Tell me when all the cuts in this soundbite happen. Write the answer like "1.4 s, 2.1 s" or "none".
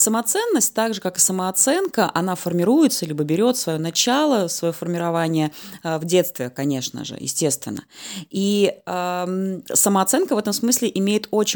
none

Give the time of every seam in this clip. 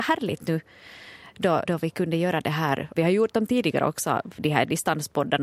1.6 s, 3.0 s

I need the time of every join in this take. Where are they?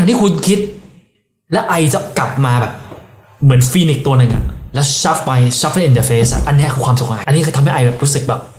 7.2 s

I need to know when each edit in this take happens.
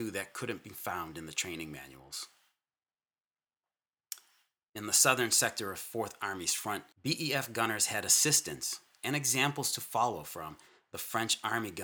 4.6 s, 6.9 s

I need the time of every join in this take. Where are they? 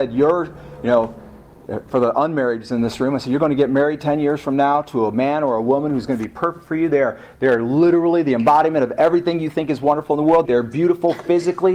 10.4 s

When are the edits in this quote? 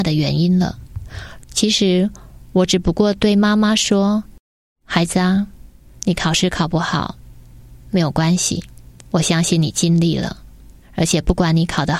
1.4 s

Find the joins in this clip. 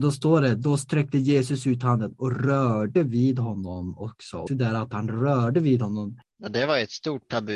4.5 s

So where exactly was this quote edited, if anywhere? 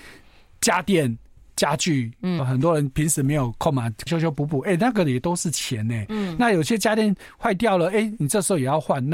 2.4 s, 4.1 s

